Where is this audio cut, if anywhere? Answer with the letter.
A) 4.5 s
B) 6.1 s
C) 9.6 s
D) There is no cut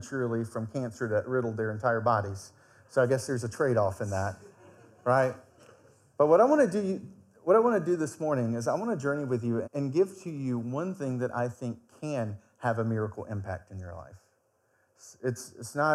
C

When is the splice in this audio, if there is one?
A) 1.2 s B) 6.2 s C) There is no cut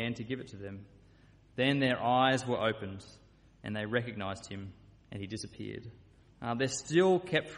B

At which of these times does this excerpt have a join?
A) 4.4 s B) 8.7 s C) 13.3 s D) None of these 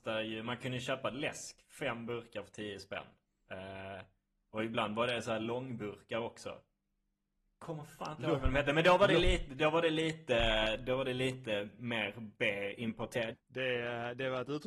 C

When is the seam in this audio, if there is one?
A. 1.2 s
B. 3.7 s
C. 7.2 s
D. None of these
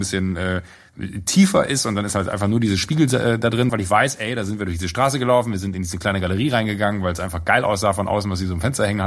B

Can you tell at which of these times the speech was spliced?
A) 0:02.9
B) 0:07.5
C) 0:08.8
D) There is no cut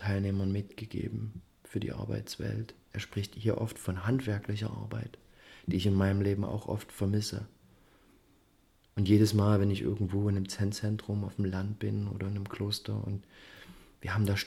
A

